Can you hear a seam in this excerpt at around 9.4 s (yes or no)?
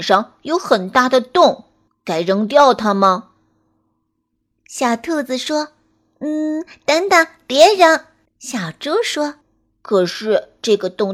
yes